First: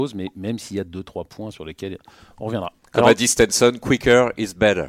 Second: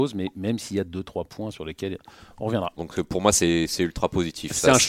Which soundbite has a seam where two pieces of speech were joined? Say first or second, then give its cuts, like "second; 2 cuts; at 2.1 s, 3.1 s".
second; 1 cut; at 2.8 s